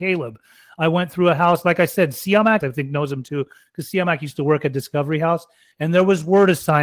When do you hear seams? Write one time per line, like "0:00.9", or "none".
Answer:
0:02.6
0:05.7